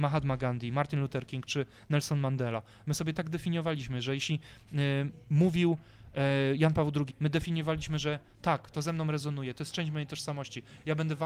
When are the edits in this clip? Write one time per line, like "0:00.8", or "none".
0:07.1